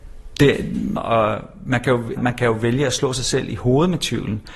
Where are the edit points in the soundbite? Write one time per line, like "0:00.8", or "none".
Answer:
0:01.0
0:02.2